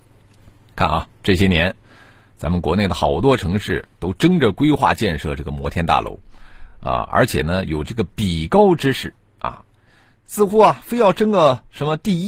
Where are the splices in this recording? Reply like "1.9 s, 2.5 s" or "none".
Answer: none